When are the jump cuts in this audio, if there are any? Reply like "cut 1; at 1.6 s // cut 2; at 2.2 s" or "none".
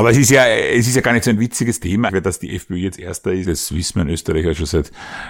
cut 1; at 2.1 s // cut 2; at 3.4 s